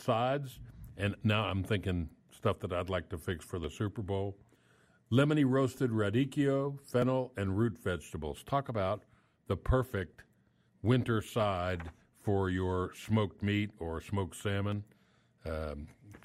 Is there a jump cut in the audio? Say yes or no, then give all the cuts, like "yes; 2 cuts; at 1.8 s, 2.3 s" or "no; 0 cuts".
no; 0 cuts